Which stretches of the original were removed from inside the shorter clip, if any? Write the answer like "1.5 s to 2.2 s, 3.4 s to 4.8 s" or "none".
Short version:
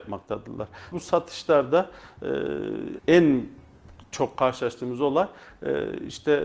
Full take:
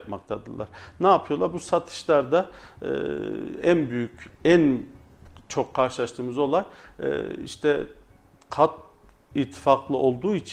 0.9 s to 1.5 s, 3.6 s to 4.3 s